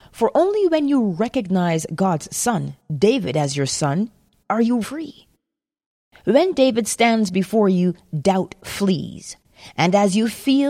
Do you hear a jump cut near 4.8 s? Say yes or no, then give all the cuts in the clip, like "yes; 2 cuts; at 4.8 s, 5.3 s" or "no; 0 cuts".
yes; 1 cut; at 4.8 s